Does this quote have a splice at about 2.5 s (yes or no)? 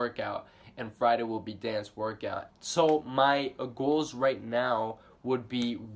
yes